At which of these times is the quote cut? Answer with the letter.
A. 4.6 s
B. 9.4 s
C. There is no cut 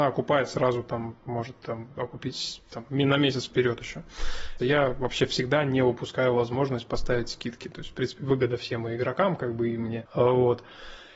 A